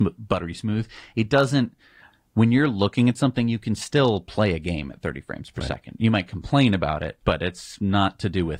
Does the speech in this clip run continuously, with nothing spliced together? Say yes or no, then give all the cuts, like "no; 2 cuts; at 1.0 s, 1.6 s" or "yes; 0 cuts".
yes; 0 cuts